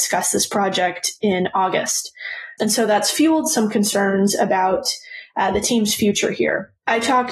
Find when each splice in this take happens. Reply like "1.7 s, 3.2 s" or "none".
2.6 s